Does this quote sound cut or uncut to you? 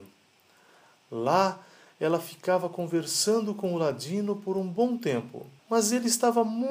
cut